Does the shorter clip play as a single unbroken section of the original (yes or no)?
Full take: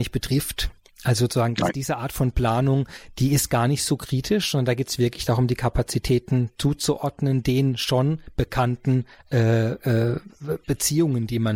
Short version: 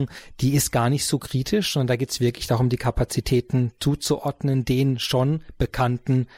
yes